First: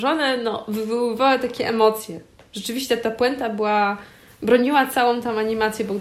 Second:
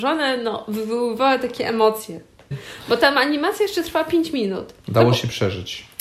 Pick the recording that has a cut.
second; 2 cuts; at 2.5 s, 4.8 s

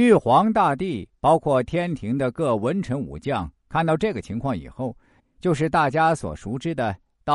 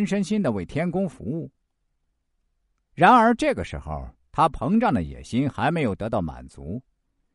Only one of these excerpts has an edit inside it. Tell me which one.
first; 1 cut; at 5.2 s

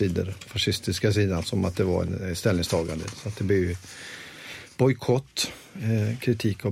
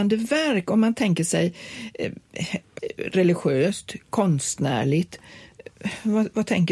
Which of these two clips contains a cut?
second; 1 cut; at 2.8 s

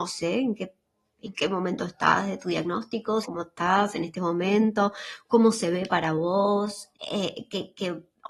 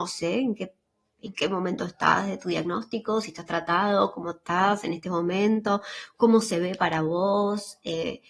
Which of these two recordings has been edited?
first; 2 cuts; at 3.2 s, 6.9 s

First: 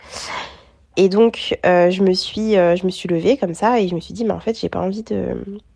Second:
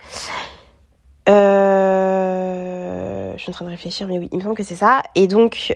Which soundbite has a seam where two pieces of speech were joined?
first; 1 cut; at 0.9 s

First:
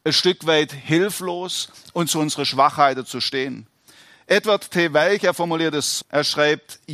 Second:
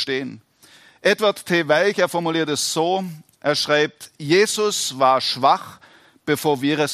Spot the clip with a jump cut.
first; 1 cut; at 6.0 s

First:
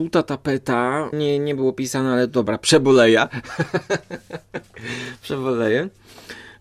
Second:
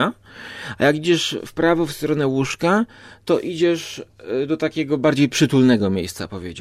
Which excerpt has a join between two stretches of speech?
first; 1 cut; at 1.1 s

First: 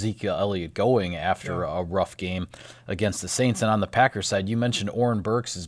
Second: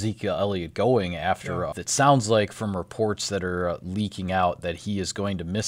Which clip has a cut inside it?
second; 1 cut; at 1.7 s

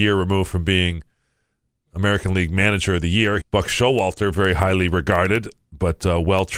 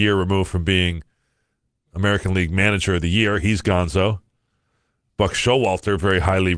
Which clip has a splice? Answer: first; 1 cut; at 3.4 s

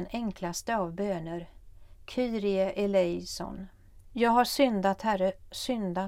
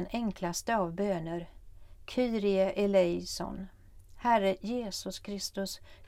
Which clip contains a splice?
first; 1 cut; at 4.0 s

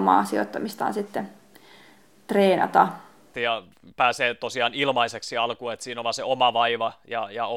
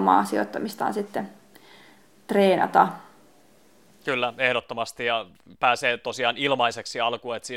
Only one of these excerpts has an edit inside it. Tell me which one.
first; 1 cut; at 3.3 s

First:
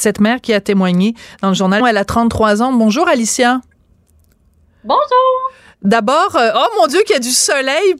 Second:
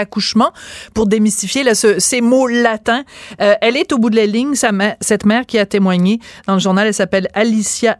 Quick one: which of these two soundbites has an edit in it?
first; 1 cut; at 1.8 s

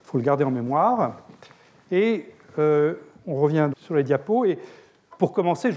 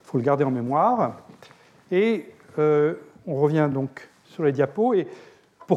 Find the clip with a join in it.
first; 1 cut; at 3.7 s

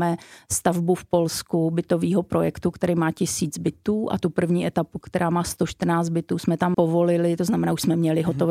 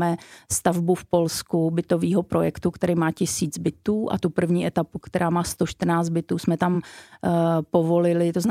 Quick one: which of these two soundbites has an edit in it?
first; 1 cut; at 6.7 s

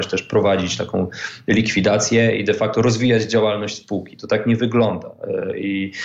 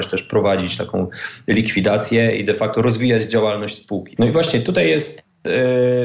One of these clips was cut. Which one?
second; 1 cut; at 4.2 s

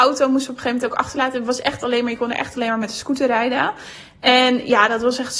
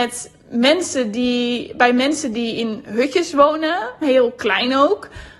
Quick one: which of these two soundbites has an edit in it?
second; 1 cut; at 4.0 s

